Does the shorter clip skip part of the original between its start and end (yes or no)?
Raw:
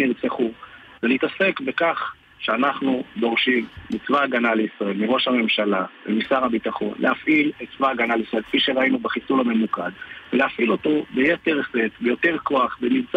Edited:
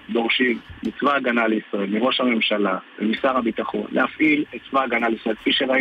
no